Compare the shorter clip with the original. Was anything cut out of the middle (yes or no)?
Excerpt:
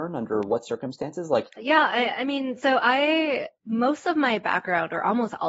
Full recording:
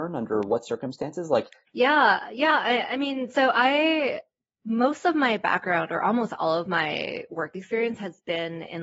yes